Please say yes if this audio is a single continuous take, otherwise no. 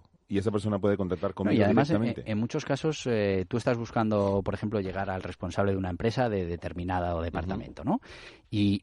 yes